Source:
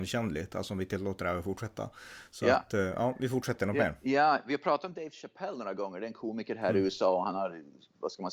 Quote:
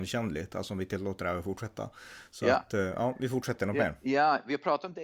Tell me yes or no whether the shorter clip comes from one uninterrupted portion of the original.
yes